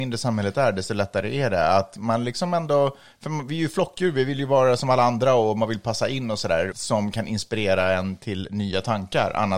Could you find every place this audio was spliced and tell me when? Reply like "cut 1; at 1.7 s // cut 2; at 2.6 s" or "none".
cut 1; at 6.7 s